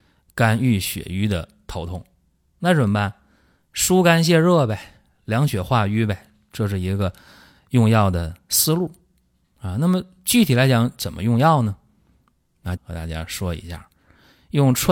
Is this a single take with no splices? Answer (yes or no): no